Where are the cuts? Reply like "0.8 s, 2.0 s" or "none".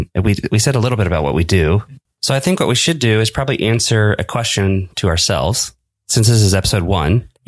2.1 s